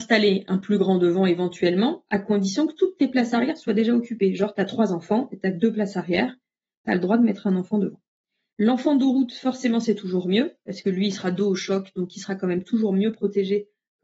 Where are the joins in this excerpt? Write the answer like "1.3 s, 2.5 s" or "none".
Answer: 8.5 s